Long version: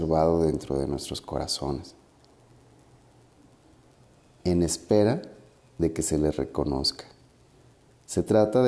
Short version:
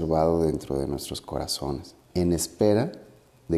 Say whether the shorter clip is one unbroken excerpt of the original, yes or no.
no